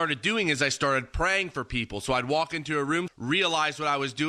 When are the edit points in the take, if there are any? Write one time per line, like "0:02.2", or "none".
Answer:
0:03.1